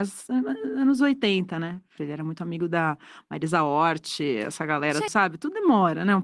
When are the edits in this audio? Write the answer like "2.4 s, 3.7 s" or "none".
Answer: 2.0 s, 5.1 s

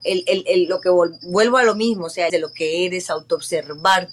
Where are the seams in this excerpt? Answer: 2.3 s

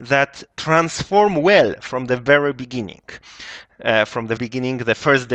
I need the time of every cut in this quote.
4.4 s

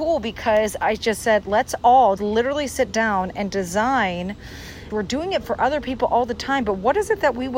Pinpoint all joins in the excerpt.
2.2 s, 4.9 s

